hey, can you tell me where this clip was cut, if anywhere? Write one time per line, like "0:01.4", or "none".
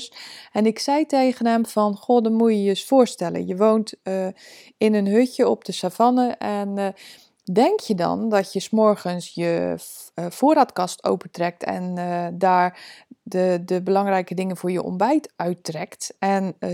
none